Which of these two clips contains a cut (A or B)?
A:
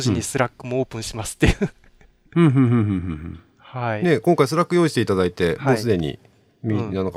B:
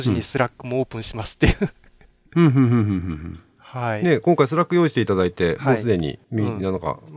B